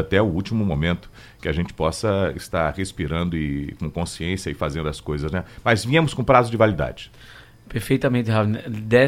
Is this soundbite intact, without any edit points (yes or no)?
yes